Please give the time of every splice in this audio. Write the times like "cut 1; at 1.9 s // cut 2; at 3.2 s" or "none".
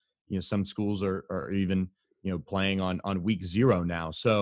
none